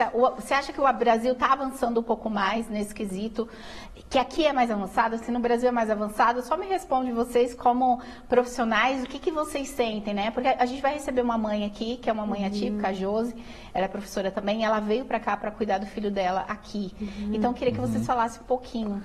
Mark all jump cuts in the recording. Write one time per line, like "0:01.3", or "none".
none

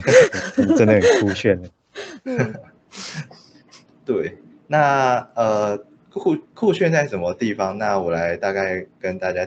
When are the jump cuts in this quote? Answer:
0:06.4

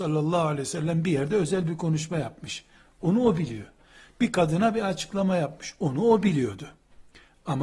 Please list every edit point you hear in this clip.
none

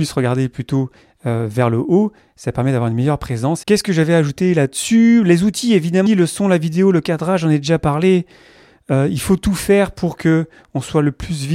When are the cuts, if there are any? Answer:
0:03.6
0:06.1

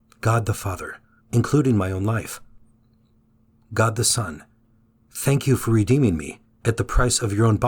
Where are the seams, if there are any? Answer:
0:01.2

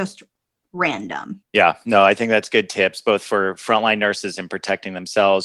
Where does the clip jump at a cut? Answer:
0:01.4

